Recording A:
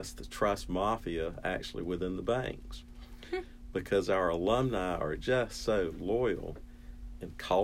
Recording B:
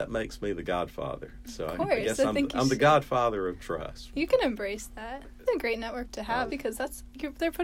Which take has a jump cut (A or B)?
B